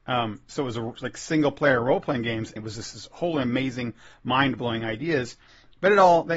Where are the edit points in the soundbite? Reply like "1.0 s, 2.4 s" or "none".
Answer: 2.6 s

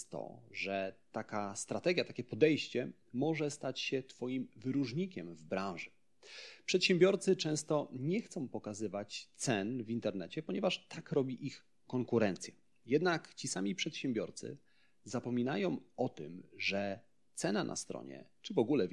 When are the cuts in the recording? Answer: none

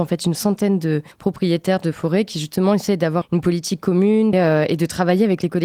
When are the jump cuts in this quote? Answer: 1.1 s, 3.2 s, 4.3 s

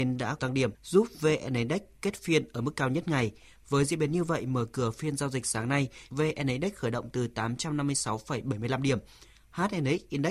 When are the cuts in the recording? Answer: none

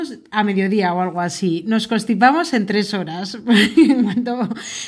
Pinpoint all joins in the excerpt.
none

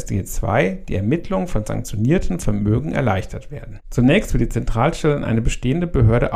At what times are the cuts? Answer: 3.8 s

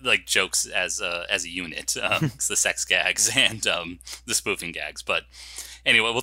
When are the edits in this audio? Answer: 2.4 s

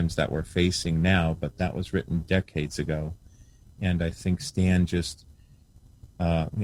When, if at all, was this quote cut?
none

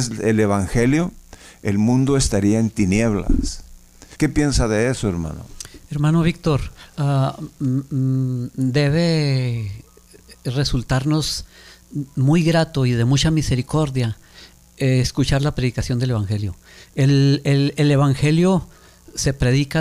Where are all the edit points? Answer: 4.1 s

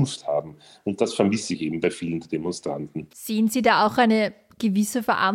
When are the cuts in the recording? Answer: 3.1 s

